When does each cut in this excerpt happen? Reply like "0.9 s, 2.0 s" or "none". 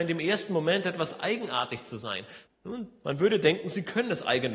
2.5 s